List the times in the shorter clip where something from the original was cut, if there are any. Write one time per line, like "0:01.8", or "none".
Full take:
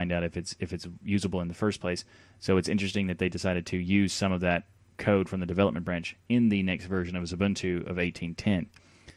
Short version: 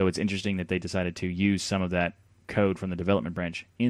none

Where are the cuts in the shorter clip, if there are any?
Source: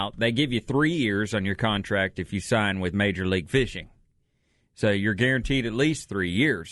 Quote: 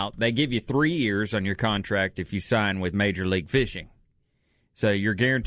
none

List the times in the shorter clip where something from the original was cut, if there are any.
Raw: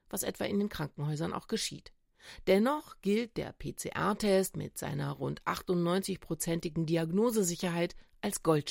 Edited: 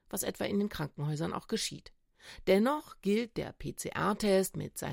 none

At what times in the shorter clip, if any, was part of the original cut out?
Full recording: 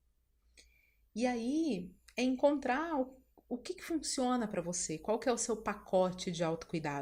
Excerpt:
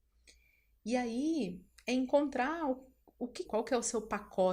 0:03.4

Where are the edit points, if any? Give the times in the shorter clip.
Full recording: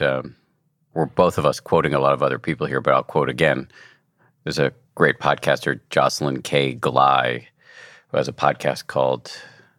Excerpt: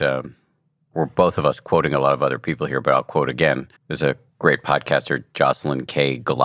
0:03.8

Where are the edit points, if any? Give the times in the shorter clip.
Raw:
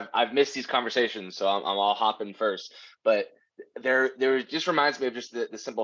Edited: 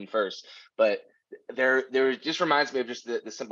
none

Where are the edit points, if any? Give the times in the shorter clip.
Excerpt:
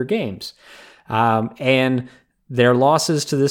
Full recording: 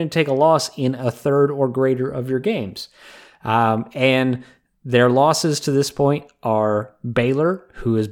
none

